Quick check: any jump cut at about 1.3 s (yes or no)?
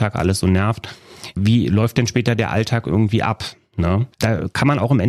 yes